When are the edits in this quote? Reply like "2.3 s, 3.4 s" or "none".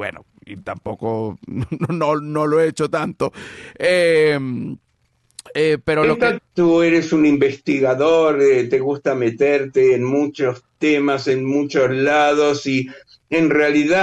6.4 s